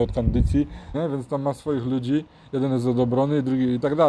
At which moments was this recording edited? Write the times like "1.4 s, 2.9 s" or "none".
0.9 s